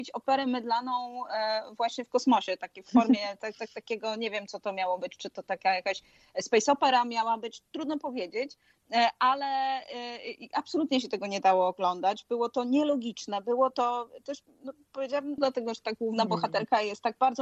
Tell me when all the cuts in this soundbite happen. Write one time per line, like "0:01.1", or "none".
0:15.4